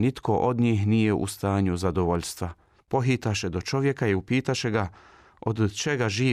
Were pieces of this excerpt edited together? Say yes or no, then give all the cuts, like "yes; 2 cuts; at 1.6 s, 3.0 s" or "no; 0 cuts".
yes; 1 cut; at 2.8 s